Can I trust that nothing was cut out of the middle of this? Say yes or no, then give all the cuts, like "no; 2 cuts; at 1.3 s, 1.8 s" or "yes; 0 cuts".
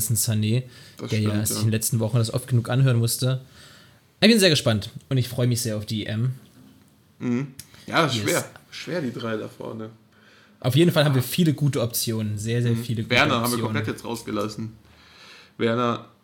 no; 1 cut; at 10.6 s